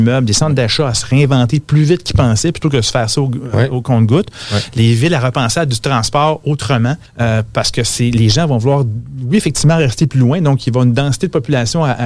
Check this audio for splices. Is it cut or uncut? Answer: cut